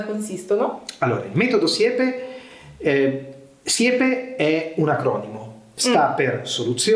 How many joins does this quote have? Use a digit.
0